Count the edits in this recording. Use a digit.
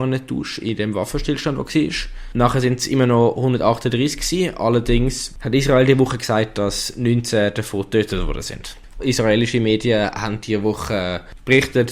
1